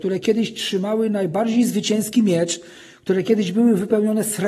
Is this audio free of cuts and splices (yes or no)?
yes